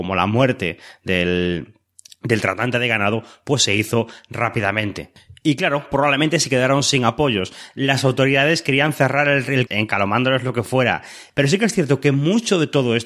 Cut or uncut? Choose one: cut